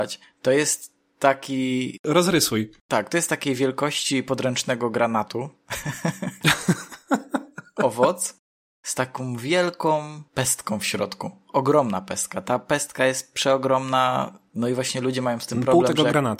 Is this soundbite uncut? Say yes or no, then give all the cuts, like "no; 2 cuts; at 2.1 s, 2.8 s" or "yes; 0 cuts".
yes; 0 cuts